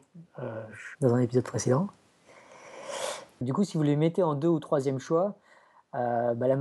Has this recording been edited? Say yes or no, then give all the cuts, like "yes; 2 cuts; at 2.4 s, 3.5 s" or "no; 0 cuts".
yes; 2 cuts; at 0.9 s, 3.4 s